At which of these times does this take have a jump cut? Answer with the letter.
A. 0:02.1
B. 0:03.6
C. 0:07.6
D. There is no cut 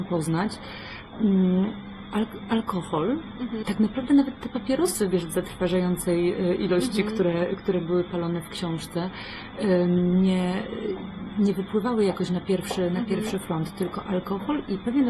B